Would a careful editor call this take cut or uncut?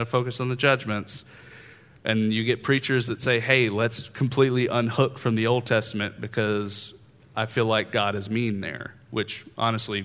uncut